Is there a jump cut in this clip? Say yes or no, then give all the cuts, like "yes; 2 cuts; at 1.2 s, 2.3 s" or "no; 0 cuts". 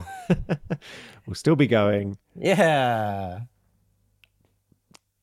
no; 0 cuts